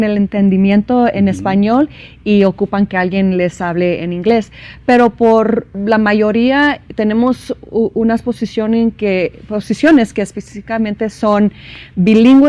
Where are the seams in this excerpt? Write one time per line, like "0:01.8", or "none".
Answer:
none